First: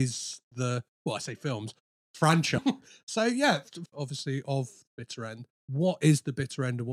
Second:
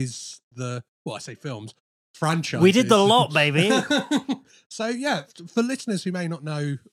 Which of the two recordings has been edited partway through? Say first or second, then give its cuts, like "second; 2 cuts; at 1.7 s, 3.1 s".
first; 3 cuts; at 2.6 s, 3.9 s, 5.6 s